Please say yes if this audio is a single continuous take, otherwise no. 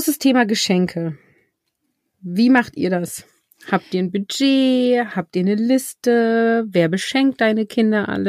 yes